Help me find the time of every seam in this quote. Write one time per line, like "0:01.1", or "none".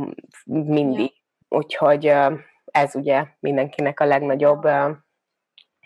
0:01.4